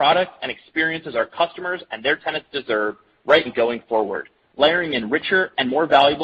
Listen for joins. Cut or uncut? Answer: cut